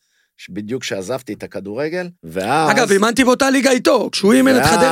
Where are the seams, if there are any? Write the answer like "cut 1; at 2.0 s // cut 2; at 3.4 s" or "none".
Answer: cut 1; at 2.2 s